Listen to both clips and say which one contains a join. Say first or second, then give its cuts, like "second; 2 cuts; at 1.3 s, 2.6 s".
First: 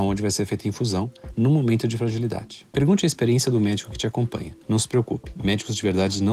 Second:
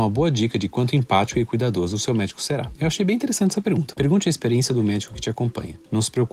second; 1 cut; at 3.9 s